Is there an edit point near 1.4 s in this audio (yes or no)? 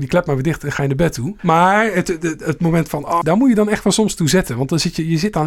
yes